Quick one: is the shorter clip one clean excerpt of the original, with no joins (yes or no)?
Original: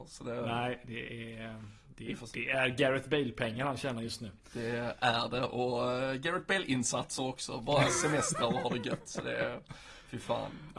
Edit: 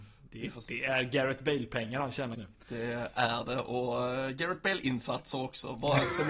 no